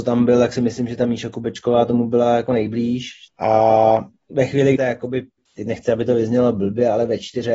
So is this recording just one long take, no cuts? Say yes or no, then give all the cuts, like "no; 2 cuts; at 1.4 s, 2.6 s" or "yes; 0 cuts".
no; 2 cuts; at 3.3 s, 4.8 s